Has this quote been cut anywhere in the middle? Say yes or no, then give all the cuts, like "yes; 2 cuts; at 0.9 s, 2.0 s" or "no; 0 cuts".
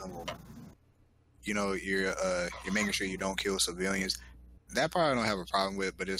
no; 0 cuts